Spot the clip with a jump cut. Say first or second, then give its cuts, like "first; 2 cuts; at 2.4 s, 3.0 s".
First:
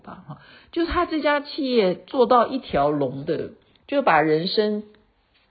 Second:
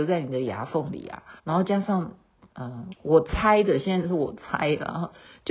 second; 2 cuts; at 1.4 s, 2.9 s